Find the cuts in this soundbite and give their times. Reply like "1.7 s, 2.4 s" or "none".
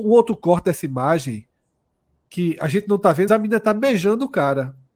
3.3 s